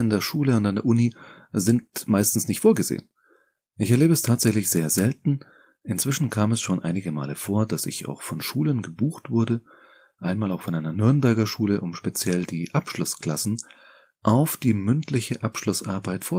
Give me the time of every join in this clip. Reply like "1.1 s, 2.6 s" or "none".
none